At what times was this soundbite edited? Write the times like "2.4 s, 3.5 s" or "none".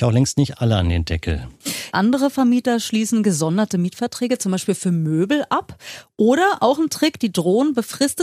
1.9 s